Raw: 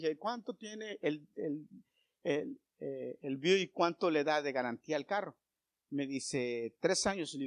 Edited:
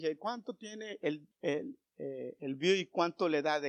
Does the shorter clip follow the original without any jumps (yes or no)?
no